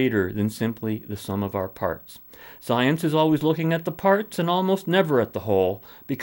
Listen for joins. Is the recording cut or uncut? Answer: uncut